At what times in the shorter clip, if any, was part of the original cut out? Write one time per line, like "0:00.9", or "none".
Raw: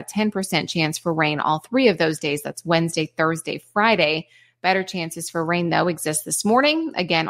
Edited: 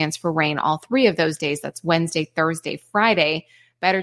none